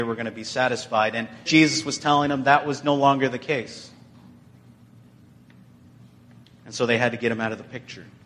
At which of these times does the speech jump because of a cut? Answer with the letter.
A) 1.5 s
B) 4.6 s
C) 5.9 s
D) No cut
A